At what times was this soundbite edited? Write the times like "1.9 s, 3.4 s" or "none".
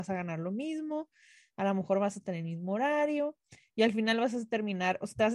none